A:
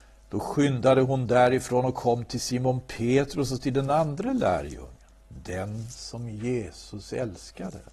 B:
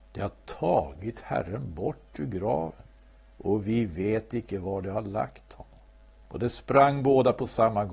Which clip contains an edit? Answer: B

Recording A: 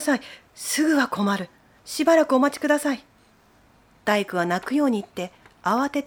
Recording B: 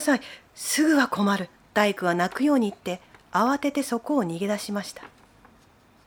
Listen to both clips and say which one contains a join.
B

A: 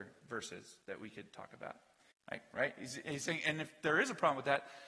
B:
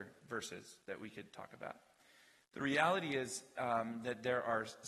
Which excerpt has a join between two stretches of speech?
A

